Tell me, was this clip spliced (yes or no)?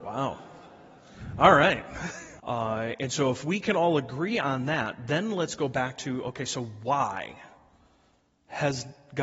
yes